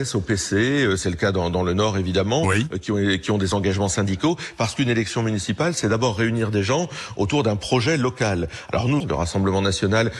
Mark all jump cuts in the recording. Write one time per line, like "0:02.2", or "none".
0:09.0